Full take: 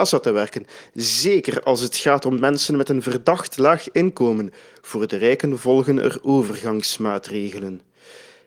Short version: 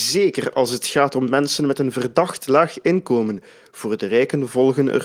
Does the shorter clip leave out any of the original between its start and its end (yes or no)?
no